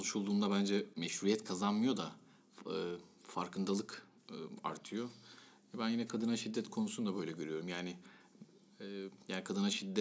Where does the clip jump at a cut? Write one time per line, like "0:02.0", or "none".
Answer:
none